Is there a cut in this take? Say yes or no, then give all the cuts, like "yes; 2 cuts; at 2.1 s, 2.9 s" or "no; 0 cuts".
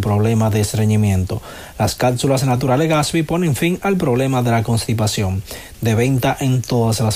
no; 0 cuts